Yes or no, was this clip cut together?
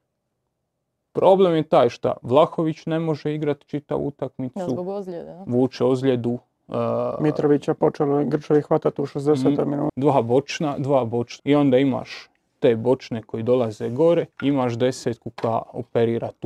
yes